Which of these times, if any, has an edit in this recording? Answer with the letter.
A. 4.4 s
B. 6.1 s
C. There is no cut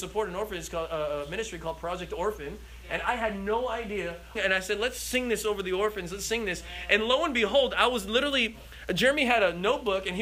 A